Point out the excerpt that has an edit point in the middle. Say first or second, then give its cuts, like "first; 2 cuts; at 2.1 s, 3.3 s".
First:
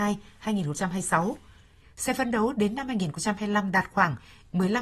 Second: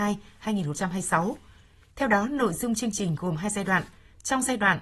first; 1 cut; at 1.8 s